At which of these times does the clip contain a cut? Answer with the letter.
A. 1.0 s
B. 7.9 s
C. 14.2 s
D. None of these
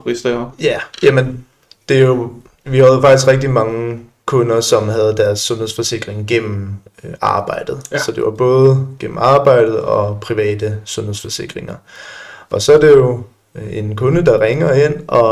D